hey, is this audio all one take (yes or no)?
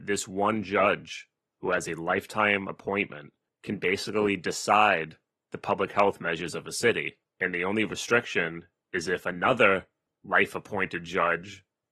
yes